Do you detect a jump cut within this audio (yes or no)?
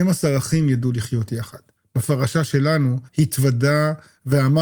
yes